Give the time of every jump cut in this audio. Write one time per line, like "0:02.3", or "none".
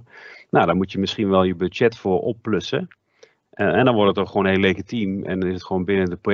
0:03.4